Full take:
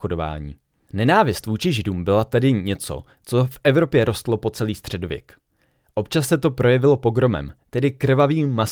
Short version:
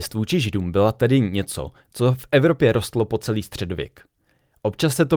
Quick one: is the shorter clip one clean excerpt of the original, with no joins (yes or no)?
yes